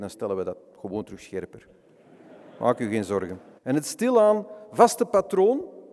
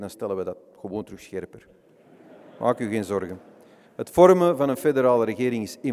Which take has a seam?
first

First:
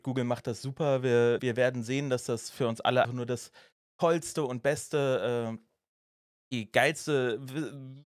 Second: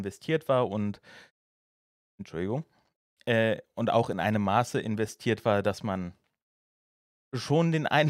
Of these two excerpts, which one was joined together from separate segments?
first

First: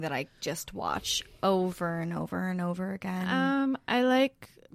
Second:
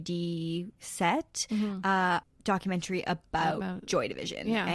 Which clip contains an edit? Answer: second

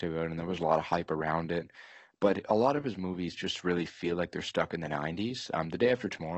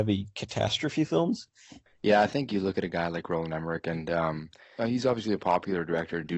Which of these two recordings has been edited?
second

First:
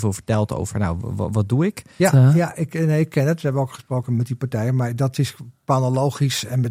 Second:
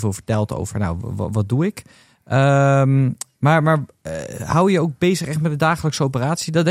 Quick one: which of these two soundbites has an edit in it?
first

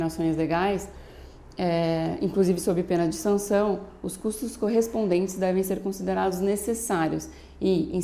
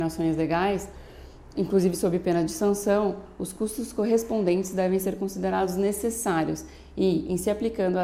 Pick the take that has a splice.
second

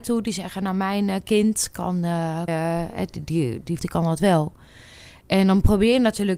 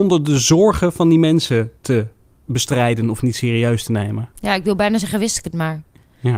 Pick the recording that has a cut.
first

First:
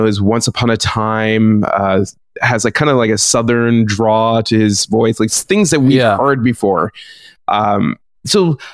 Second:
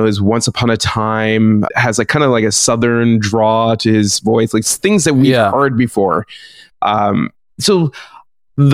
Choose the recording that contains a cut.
second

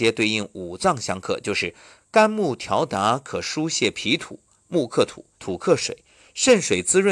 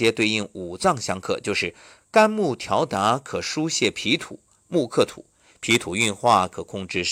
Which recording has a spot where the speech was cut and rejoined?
first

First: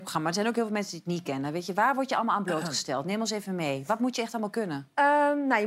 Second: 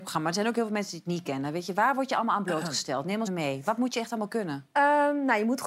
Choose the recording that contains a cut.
second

